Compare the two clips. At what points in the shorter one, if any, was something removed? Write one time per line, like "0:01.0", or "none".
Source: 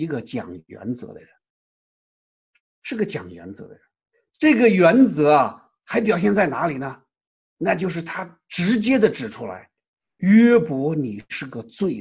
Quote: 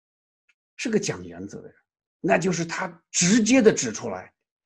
0:02.1